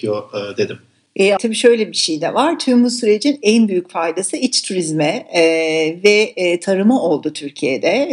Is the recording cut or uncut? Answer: cut